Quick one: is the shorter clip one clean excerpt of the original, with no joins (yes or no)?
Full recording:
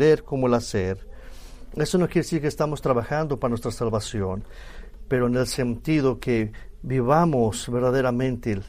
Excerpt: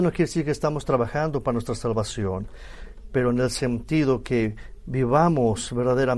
yes